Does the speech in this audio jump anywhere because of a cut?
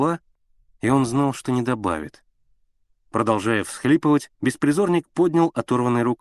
yes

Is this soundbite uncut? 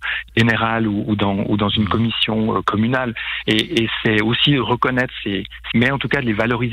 no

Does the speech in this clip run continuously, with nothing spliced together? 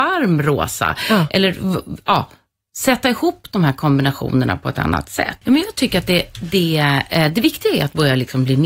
no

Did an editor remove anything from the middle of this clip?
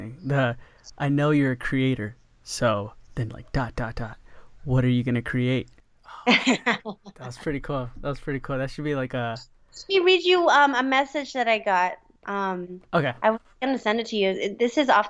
no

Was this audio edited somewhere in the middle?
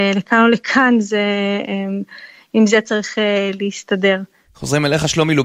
no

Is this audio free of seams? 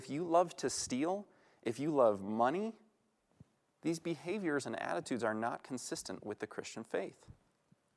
yes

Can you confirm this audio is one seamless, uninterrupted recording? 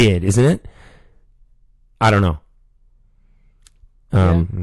yes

